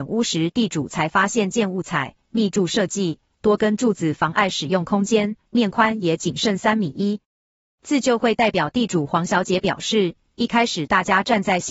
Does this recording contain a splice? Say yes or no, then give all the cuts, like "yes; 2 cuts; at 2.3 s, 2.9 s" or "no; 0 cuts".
no; 0 cuts